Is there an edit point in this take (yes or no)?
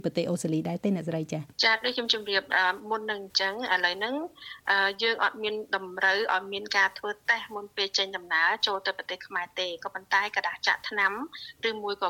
yes